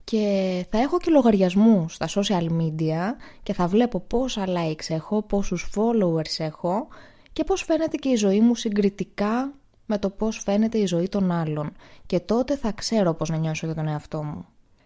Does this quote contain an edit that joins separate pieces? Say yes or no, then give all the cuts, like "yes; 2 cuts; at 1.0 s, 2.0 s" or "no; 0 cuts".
no; 0 cuts